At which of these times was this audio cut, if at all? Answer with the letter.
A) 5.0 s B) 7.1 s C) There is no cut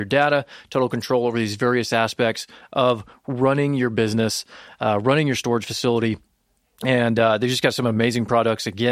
C